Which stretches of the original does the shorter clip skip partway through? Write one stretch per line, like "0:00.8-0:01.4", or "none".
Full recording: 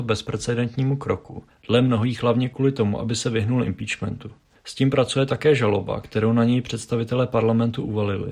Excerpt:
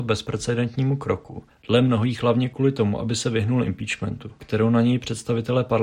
0:04.4-0:06.0